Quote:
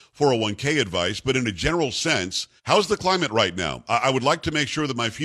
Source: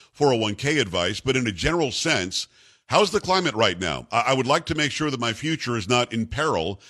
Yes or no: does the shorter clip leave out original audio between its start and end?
yes